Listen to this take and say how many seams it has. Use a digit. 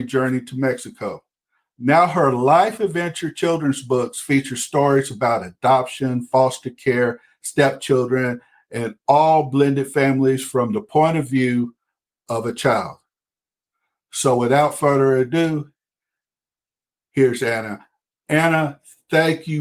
0